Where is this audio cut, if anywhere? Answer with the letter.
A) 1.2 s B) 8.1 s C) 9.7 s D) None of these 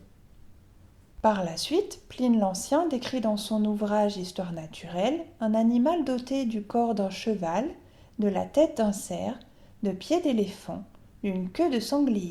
D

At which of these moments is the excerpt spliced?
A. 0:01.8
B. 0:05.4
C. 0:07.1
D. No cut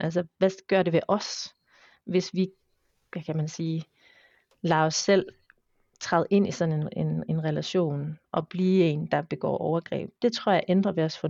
D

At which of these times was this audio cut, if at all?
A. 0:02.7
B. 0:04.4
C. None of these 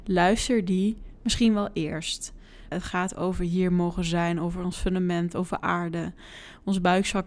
A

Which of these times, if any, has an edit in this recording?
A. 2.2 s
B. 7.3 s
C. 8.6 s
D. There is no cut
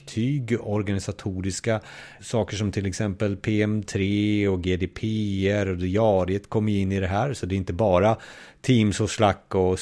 A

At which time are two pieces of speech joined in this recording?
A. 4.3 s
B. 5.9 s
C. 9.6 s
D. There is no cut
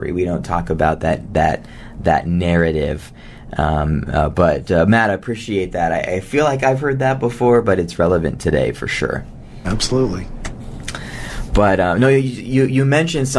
D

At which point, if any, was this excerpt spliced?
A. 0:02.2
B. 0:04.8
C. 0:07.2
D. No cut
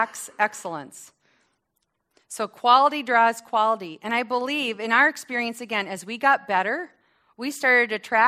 D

